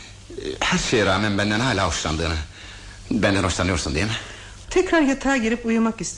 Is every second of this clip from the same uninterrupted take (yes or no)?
no